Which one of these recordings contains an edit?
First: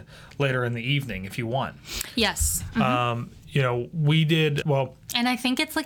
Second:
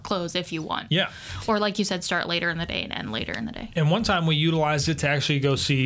first; 1 cut; at 4.6 s

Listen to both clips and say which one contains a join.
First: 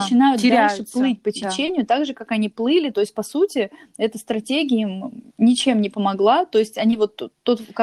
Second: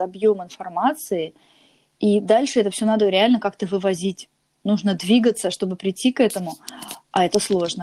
first; 1 cut; at 5.3 s

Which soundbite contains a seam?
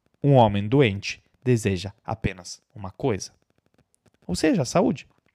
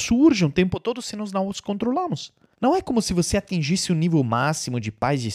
second; 1 cut; at 2.5 s

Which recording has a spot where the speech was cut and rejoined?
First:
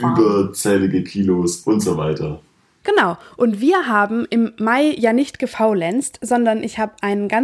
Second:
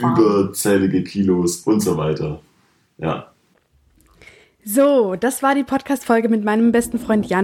first; 1 cut; at 2.8 s

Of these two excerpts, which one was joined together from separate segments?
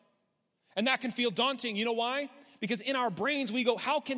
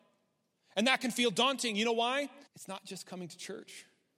second; 1 cut; at 2.5 s

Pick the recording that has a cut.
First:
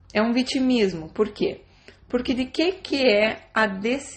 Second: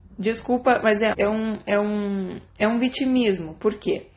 second; 2 cuts; at 1.1 s, 2.5 s

